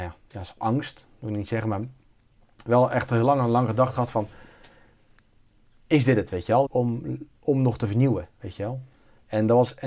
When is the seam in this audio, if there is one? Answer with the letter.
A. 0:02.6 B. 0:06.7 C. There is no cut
B